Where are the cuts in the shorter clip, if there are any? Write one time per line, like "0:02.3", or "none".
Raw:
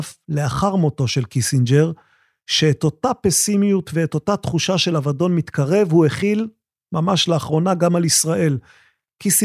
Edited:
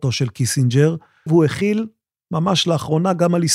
0:01.3